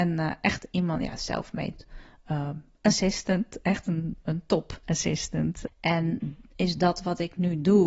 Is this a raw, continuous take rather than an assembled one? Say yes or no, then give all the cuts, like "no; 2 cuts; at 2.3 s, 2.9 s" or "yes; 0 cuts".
no; 1 cut; at 5.7 s